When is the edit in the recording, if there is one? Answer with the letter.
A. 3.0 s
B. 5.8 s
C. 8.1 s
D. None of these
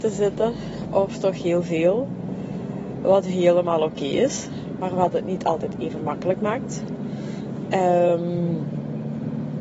D